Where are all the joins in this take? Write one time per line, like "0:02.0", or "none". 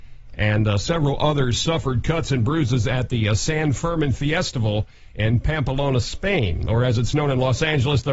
none